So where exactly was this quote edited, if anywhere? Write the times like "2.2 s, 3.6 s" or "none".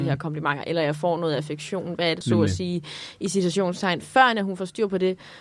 2.2 s